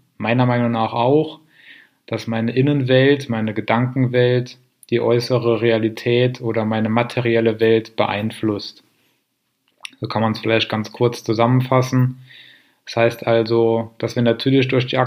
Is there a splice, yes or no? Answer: no